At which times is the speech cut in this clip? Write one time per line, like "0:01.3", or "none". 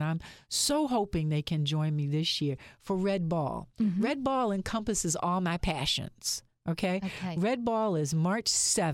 none